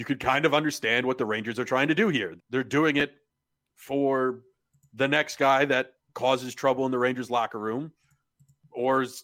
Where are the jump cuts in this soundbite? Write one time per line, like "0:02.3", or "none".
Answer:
0:02.4